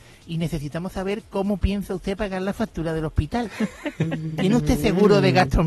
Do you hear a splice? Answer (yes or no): no